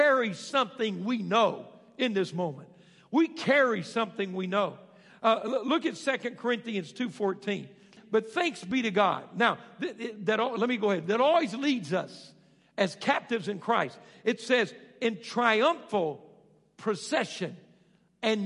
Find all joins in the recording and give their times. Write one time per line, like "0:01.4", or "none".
0:08.0

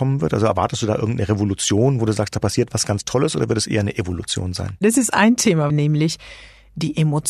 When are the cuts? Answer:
0:05.7

